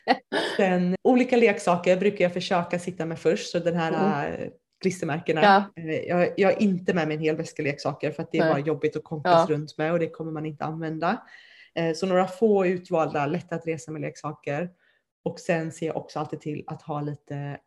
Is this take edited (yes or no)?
yes